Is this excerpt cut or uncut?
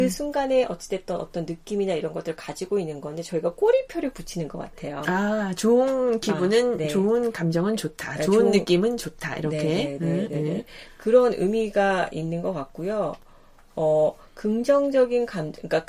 uncut